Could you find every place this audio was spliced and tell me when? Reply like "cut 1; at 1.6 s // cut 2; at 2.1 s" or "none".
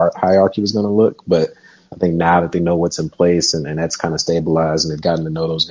none